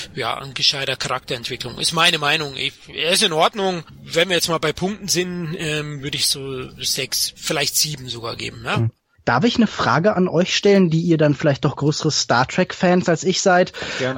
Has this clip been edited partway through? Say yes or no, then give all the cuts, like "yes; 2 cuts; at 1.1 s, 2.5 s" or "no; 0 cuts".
no; 0 cuts